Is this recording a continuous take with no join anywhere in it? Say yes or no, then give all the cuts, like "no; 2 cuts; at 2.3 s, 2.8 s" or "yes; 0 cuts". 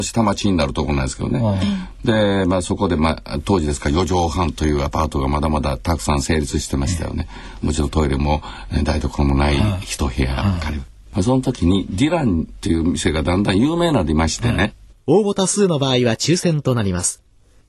no; 2 cuts; at 7.6 s, 14.9 s